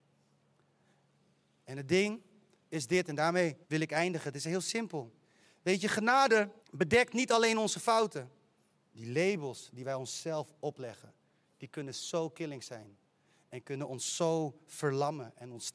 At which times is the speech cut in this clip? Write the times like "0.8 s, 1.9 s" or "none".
3.6 s, 6.6 s, 8.7 s